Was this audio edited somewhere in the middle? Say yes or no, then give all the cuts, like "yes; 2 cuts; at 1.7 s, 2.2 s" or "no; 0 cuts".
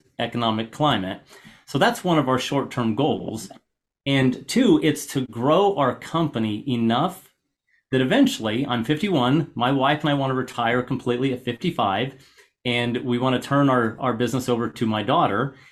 no; 0 cuts